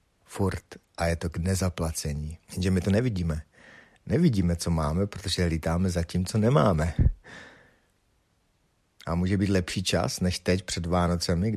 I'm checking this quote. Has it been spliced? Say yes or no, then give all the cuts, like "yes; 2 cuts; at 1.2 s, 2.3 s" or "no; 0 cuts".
yes; 1 cut; at 2.4 s